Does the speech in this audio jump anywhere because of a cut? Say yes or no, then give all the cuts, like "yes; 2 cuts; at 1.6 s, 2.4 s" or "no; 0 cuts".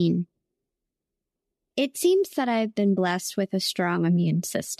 no; 0 cuts